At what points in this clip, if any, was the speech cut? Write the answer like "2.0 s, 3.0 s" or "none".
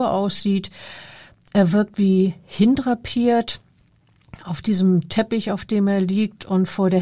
none